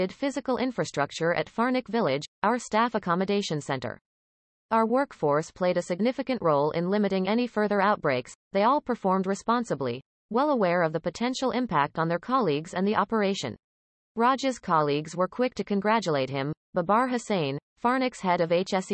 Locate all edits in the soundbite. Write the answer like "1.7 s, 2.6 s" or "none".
14.0 s